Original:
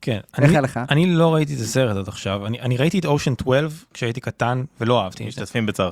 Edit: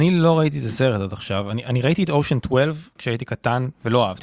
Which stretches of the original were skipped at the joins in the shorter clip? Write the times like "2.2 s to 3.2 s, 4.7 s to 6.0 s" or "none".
none